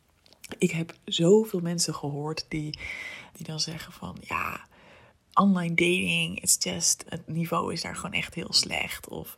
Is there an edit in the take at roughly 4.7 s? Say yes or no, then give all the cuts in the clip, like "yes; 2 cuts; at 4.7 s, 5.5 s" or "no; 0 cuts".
no; 2 cuts; at 3.3 s, 7.1 s